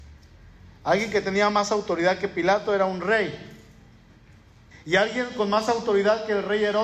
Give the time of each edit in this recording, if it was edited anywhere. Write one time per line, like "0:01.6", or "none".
0:04.7